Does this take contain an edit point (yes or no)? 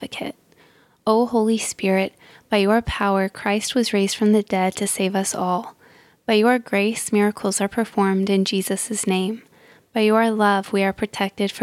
no